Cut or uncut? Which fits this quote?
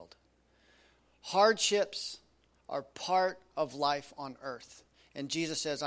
uncut